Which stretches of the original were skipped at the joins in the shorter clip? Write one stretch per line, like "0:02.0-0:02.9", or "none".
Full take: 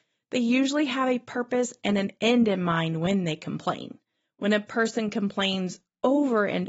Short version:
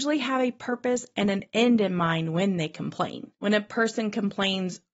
0:04.0-0:04.3

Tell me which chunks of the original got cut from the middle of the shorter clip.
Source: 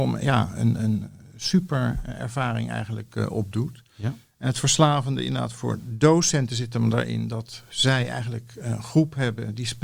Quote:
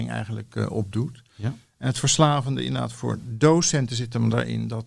none

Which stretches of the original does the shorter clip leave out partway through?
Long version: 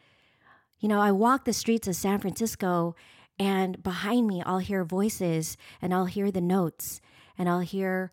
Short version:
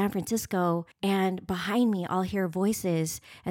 0:03.0-0:03.3

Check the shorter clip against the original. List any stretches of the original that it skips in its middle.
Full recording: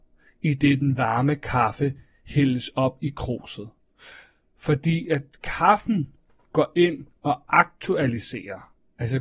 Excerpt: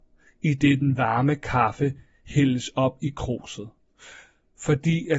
none

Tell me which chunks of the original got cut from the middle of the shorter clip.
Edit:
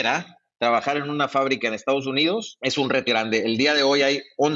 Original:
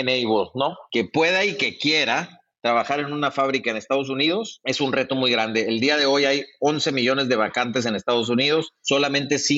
0:05.1-0:05.3

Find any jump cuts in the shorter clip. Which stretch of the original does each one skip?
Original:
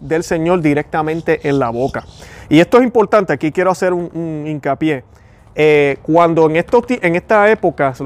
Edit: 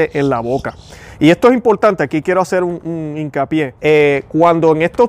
0:05.1-0:05.5

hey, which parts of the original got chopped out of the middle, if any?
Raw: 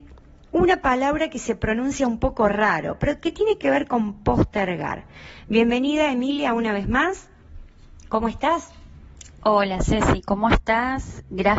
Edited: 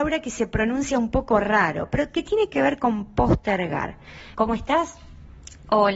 0:05.4-0:08.1

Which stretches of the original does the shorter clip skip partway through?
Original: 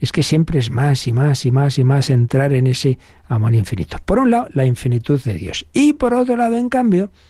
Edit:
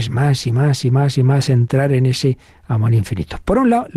none

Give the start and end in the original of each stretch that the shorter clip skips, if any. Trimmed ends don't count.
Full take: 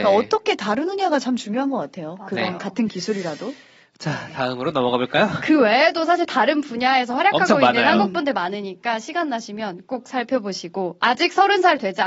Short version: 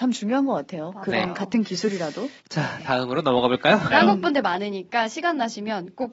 0:03.6-0:03.9
0:05.4-0:07.8

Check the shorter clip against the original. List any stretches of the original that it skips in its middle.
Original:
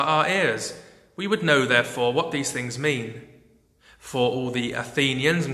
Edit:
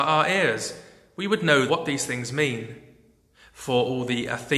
0:01.7-0:02.1

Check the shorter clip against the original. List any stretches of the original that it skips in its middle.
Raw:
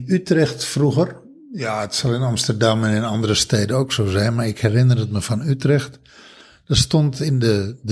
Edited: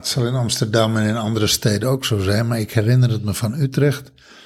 none

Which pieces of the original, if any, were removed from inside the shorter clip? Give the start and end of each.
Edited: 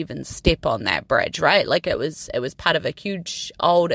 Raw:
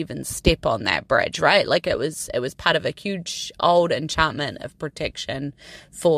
none

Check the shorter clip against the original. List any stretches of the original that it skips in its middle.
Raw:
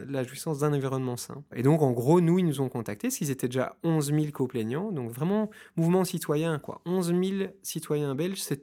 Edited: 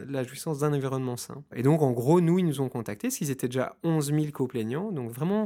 none

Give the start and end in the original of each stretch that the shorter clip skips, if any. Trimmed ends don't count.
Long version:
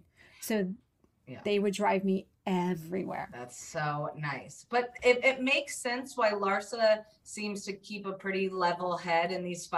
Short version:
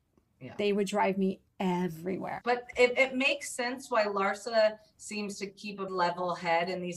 0:03.3-0:04.7
0:08.1-0:08.5

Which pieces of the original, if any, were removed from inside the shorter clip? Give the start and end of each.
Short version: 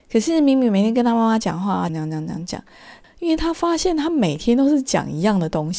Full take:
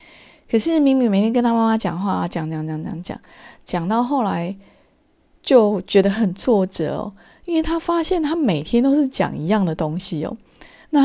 0:02.3-0:02.5
0:03.6-0:07.3

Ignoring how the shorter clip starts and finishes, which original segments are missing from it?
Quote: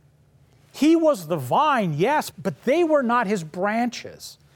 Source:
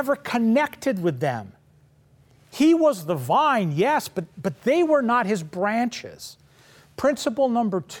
0:04.1-0:04.3

